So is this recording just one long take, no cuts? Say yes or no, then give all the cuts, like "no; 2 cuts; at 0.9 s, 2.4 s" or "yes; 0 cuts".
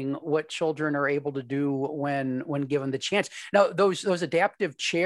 yes; 0 cuts